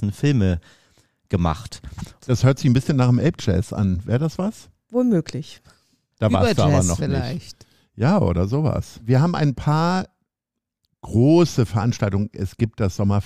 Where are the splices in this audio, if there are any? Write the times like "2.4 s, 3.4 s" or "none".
2.2 s